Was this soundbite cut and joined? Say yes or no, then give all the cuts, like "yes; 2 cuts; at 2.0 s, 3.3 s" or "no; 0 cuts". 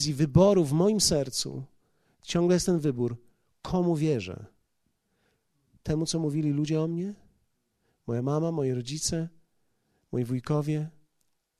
no; 0 cuts